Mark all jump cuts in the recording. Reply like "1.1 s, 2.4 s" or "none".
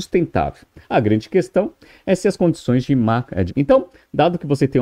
3.5 s